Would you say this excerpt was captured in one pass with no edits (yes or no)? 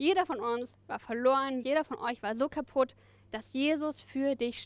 no